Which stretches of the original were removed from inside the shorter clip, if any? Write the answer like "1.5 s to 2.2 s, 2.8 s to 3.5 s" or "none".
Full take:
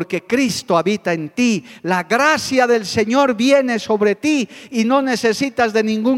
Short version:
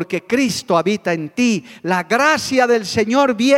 none